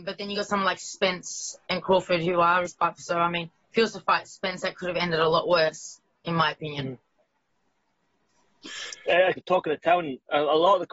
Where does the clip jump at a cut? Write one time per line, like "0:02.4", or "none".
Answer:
0:02.7
0:09.4